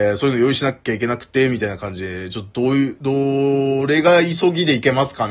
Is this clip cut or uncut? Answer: uncut